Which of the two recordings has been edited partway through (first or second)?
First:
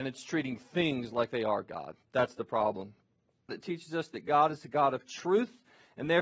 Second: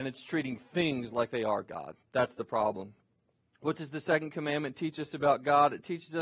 first